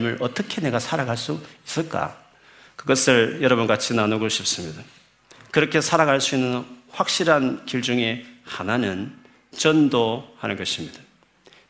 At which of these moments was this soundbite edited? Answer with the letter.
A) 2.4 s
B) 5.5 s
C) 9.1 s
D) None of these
D